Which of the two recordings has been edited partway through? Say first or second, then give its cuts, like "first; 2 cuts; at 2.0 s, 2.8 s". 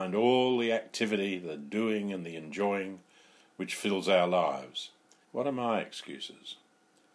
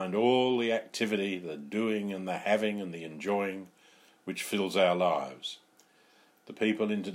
first; 2 cuts; at 2.1 s, 5.2 s